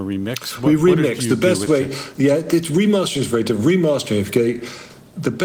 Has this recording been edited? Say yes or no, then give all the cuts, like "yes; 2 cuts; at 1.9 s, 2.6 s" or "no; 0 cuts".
no; 0 cuts